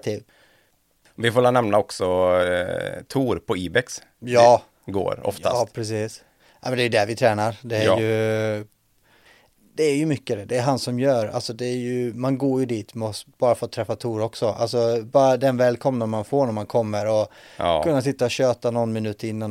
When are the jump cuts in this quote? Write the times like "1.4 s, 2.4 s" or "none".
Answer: 4.7 s